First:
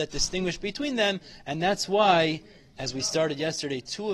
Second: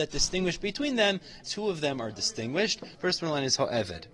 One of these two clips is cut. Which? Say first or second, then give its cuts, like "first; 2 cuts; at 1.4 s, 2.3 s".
second; 2 cuts; at 1.4 s, 2.9 s